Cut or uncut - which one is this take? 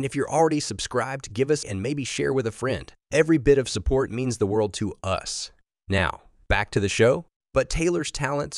cut